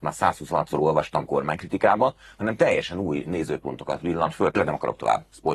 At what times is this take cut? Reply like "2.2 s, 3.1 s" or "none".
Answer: none